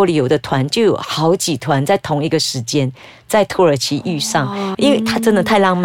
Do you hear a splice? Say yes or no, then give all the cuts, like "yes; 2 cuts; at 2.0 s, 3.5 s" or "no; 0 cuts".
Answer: yes; 1 cut; at 4.7 s